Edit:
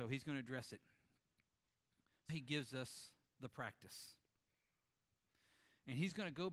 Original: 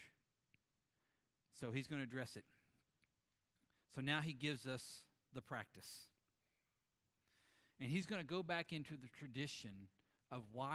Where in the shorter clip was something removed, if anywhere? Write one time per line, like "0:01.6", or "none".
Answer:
0:02.3